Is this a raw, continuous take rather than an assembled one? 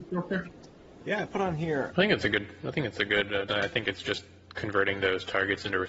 no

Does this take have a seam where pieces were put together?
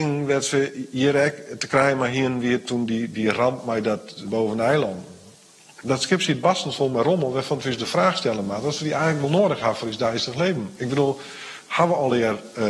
yes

